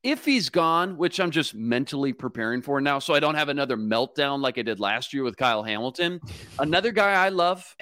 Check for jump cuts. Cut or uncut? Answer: uncut